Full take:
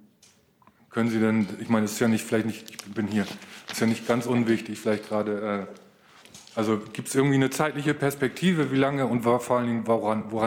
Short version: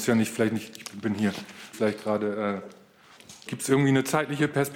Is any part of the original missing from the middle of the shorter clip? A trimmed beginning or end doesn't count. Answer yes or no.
yes